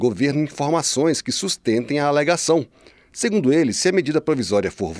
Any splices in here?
no; 0 cuts

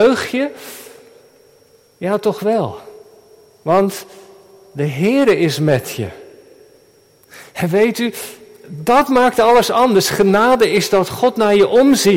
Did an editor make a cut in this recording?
no; 0 cuts

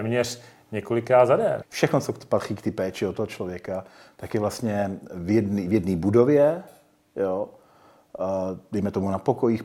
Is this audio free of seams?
no; 1 cut; at 1.6 s

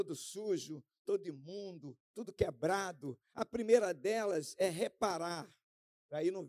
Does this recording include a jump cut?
yes; 1 cut; at 3.3 s

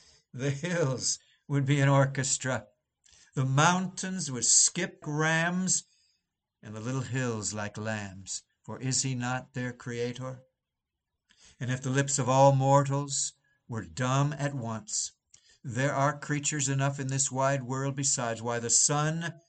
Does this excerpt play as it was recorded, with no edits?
no; 1 cut; at 5.0 s

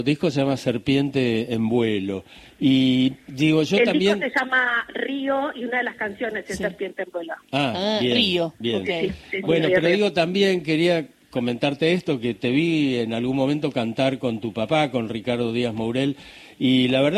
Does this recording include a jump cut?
no; 0 cuts

